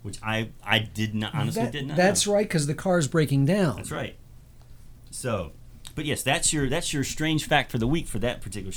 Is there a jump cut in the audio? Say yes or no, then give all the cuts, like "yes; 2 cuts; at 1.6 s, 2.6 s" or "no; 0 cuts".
no; 0 cuts